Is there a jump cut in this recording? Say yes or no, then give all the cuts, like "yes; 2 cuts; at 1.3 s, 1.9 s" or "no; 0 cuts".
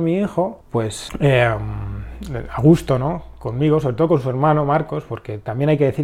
yes; 1 cut; at 1.1 s